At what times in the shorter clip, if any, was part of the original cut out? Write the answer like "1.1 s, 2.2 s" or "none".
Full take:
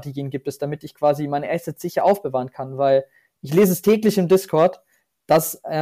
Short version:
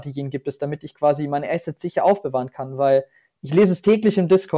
none